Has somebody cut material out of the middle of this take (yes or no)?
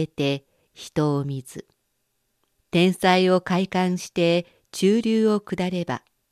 yes